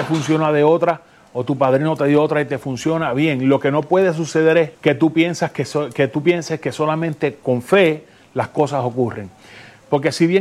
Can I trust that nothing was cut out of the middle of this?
yes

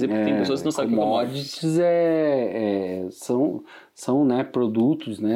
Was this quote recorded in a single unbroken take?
yes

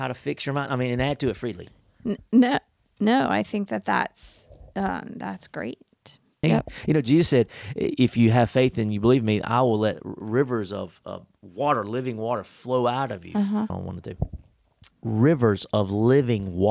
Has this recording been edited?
yes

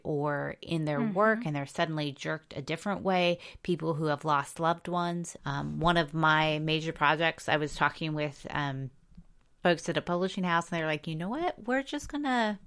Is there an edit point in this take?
yes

